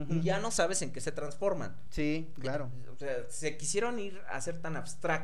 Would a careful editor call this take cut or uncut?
uncut